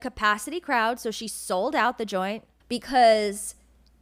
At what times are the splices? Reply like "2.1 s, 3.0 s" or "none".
2.6 s